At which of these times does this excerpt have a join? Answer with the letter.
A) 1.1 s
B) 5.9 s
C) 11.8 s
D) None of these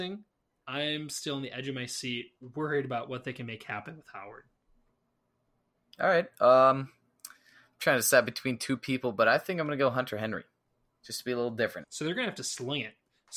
C